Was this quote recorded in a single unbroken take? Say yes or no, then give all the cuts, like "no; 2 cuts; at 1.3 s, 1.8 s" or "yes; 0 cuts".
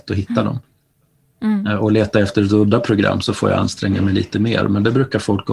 yes; 0 cuts